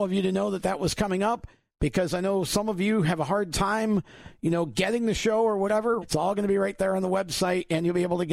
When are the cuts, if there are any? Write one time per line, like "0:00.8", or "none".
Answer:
0:06.0